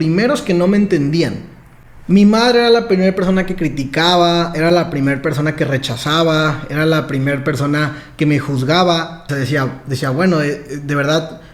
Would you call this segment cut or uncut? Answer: cut